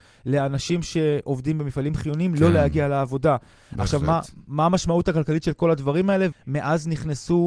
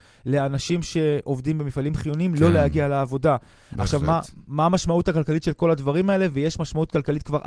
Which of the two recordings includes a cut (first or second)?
first